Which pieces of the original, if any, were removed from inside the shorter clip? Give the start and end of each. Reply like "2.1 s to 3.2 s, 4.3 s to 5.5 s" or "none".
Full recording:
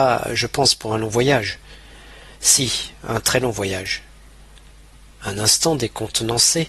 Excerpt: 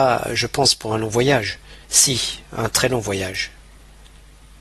1.8 s to 2.3 s